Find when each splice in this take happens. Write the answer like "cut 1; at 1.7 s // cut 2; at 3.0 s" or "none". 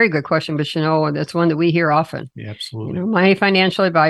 none